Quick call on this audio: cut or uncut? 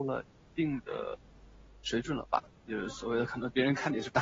uncut